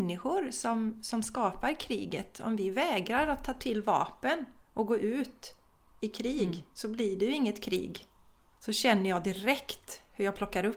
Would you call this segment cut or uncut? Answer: cut